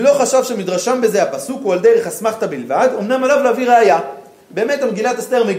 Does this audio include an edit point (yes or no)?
no